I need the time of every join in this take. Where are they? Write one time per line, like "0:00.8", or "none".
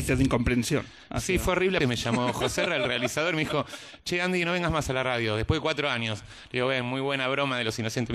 0:01.8